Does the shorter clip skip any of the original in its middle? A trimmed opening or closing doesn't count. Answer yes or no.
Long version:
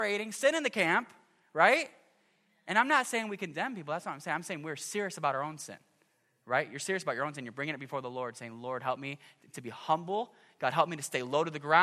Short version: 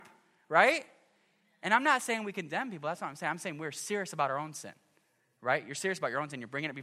no